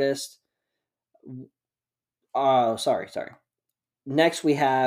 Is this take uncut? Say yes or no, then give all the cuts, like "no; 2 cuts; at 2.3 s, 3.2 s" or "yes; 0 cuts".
yes; 0 cuts